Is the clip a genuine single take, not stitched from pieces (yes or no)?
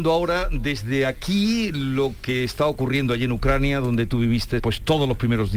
no